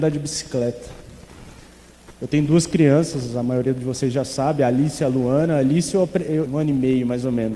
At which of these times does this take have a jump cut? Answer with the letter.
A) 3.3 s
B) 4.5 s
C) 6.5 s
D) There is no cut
C